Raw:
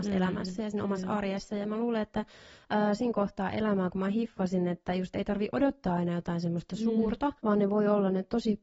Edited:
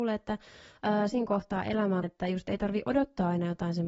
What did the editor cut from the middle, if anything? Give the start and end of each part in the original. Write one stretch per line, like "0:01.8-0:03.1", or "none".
0:03.9-0:04.7